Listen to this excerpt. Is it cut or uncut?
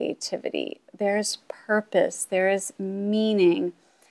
uncut